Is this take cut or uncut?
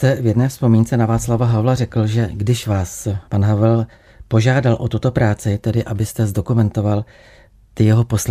cut